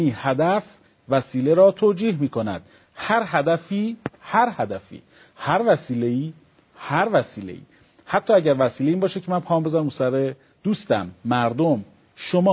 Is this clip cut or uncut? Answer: uncut